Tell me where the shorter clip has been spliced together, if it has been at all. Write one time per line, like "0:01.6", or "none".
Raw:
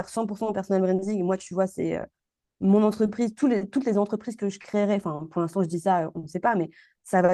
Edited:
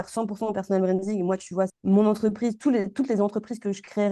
0:01.7